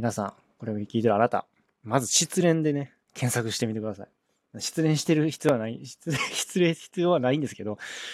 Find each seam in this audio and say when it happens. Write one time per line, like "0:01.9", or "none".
0:03.0